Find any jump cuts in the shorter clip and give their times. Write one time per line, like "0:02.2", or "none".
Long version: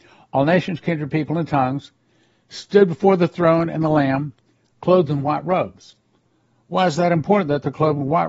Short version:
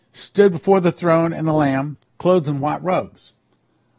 0:02.1